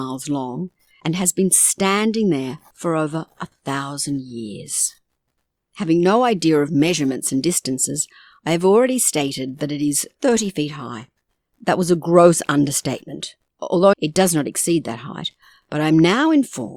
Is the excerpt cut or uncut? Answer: cut